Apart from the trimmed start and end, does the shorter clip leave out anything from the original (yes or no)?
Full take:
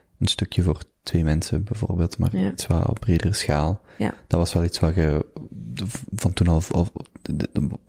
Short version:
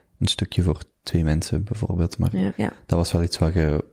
yes